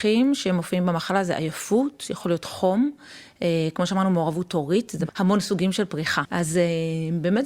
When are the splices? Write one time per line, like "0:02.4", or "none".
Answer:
0:05.1
0:06.2